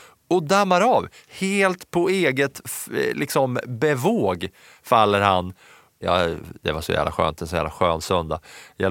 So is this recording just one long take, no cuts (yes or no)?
no